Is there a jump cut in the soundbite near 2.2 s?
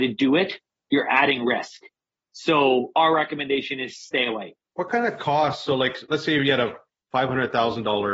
no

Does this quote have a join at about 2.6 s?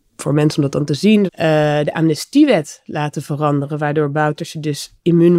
no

